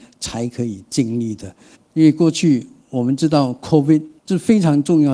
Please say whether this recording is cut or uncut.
cut